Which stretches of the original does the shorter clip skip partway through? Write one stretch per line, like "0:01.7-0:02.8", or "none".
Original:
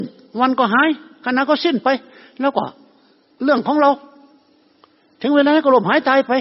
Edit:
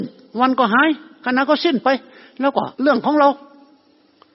0:02.7-0:03.3